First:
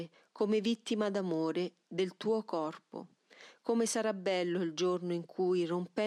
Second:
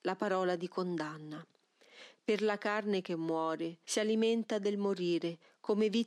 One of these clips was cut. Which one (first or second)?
second